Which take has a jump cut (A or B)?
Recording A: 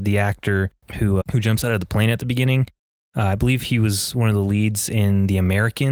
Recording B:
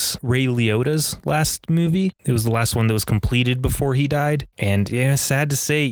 A